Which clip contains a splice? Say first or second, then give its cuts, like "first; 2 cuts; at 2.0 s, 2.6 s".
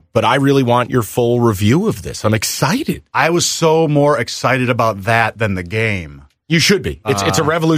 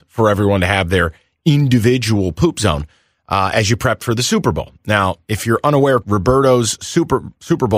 second; 1 cut; at 6.0 s